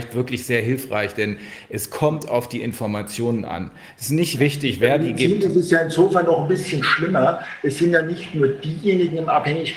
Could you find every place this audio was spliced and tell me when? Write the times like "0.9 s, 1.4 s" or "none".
none